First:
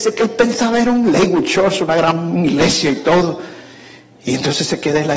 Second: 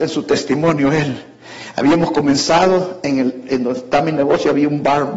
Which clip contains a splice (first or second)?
first